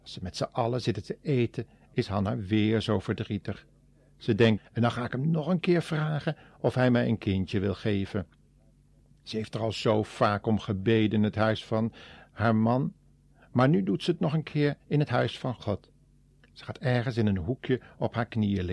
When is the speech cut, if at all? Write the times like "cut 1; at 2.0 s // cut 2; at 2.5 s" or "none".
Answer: cut 1; at 4.6 s